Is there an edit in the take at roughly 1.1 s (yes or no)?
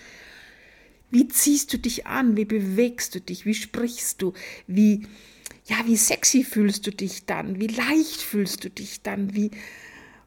yes